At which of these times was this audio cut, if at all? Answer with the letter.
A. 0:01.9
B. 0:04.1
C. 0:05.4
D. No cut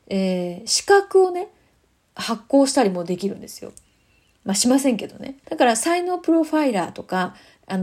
C